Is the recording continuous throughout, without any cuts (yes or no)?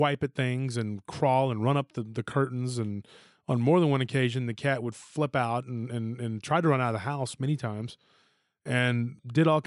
yes